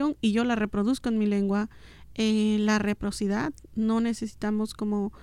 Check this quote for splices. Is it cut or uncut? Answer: uncut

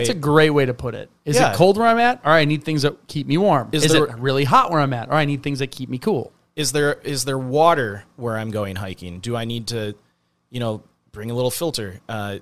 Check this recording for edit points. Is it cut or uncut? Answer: uncut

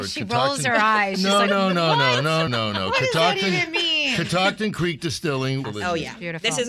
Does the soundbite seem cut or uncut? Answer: cut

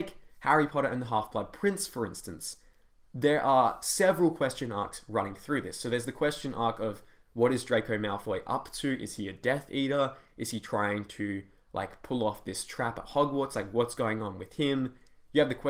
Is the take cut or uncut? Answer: uncut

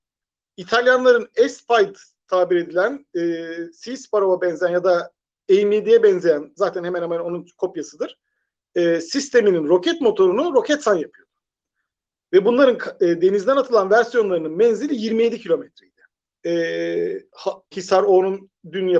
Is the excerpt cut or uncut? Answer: cut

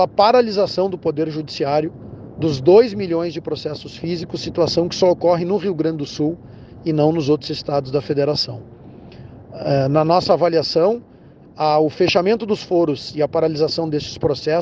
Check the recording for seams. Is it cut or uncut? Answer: uncut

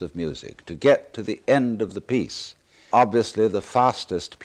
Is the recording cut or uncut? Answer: cut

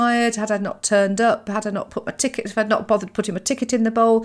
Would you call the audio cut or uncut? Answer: uncut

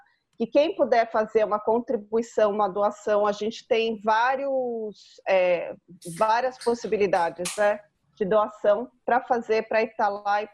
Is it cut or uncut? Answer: uncut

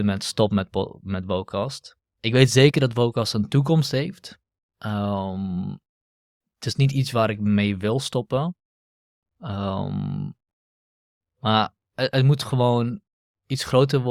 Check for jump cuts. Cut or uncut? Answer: uncut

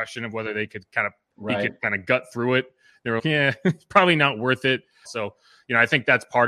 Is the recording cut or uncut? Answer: cut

